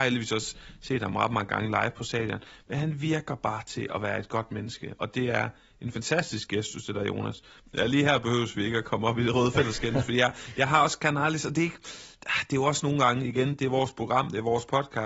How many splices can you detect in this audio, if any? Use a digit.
2